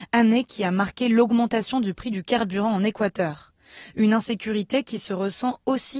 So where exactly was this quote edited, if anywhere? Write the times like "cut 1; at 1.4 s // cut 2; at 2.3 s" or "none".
none